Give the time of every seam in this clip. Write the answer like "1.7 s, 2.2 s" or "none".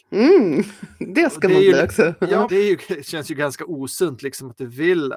2.5 s